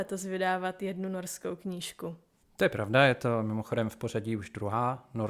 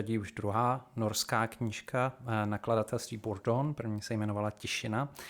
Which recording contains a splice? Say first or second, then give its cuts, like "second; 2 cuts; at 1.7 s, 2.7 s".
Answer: first; 1 cut; at 2.4 s